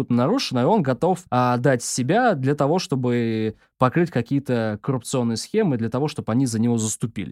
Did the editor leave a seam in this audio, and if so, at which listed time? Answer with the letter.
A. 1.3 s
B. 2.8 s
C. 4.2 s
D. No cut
A